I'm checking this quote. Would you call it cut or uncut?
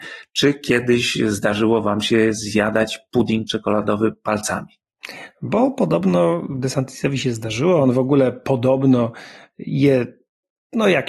uncut